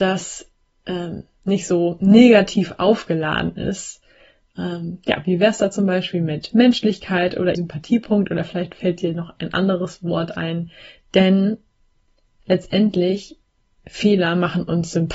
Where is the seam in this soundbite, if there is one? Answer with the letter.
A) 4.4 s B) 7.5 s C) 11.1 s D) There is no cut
B